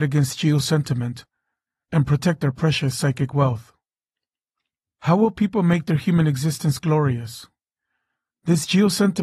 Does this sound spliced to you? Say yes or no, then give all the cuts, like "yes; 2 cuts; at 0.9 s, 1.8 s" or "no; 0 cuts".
yes; 1 cut; at 8.3 s